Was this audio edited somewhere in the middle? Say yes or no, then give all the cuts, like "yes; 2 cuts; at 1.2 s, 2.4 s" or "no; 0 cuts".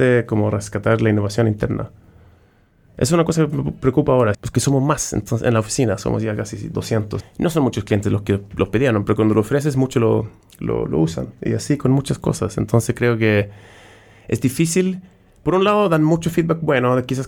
yes; 2 cuts; at 4.3 s, 7.2 s